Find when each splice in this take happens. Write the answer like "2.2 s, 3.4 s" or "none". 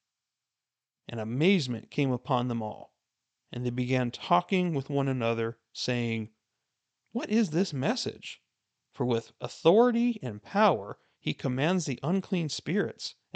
none